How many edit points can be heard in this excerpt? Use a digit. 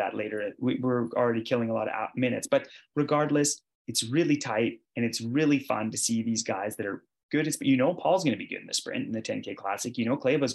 1